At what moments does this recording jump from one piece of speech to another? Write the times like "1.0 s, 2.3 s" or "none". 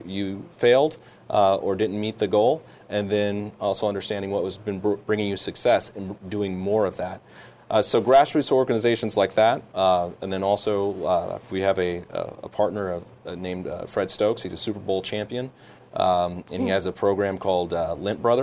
none